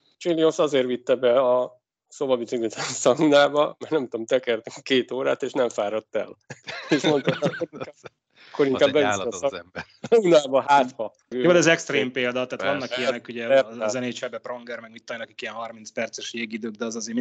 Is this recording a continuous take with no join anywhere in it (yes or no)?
no